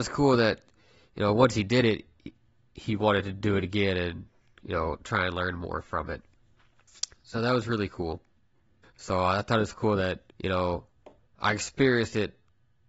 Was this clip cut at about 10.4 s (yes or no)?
yes